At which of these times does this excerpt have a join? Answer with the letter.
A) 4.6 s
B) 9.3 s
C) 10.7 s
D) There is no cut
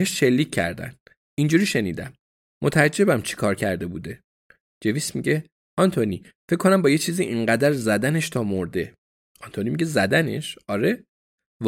D